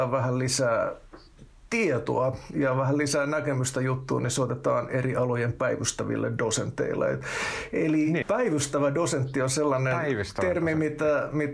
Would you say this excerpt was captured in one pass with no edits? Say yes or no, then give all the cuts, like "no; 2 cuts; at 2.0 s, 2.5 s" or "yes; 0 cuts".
no; 1 cut; at 8.2 s